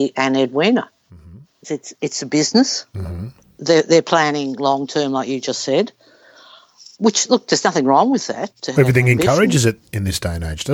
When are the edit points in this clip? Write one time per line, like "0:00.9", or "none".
0:01.6

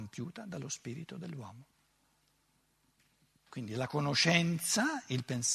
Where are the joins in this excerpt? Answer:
none

